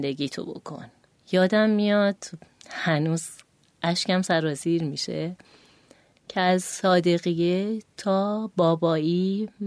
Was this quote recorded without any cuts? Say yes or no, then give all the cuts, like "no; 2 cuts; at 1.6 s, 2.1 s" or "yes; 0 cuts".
yes; 0 cuts